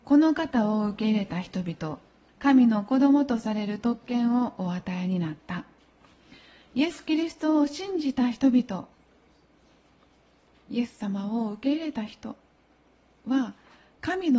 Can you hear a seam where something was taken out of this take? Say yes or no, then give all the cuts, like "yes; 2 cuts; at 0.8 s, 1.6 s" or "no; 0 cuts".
yes; 1 cut; at 2.3 s